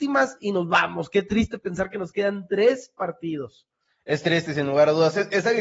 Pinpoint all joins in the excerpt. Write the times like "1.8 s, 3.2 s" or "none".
4.5 s